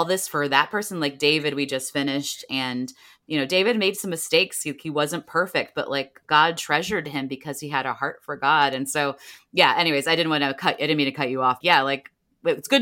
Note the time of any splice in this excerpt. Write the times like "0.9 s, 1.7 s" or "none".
11.6 s